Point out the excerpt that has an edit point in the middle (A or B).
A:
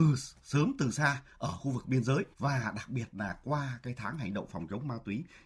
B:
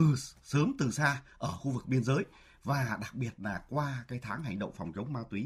A